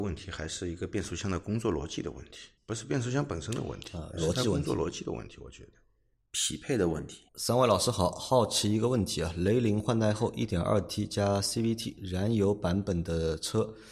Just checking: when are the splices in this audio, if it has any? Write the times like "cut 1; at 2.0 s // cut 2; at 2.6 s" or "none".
cut 1; at 2.6 s // cut 2; at 7.3 s